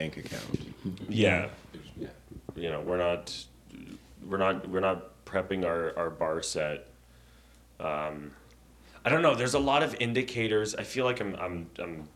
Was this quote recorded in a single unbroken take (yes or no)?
yes